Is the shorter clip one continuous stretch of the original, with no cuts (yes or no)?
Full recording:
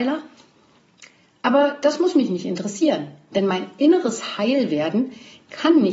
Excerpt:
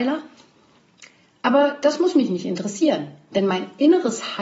yes